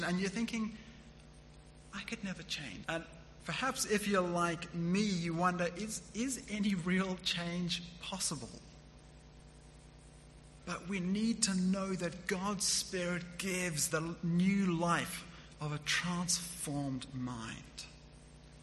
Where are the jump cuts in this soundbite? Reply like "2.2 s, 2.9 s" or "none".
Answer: 2.8 s, 10.6 s, 13.9 s